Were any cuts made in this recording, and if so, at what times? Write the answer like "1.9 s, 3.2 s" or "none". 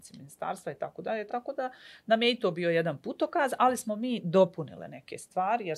none